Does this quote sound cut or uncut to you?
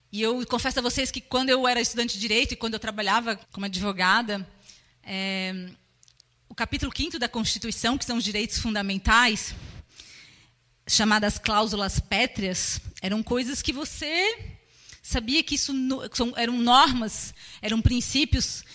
cut